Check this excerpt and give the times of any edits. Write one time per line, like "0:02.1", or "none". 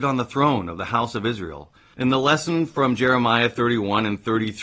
0:01.9